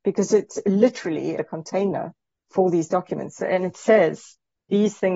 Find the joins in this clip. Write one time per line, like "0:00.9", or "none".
0:01.4